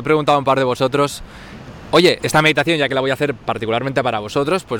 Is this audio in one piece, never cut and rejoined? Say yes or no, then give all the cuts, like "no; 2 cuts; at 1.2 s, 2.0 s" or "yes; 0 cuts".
no; 1 cut; at 2.2 s